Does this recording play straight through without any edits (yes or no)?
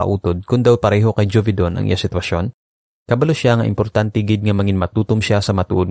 no